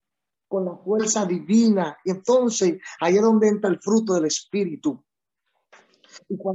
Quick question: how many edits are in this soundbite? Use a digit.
0